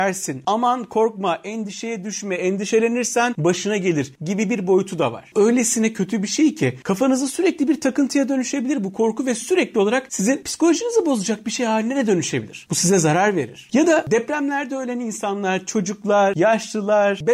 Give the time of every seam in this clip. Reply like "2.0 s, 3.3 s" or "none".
13.7 s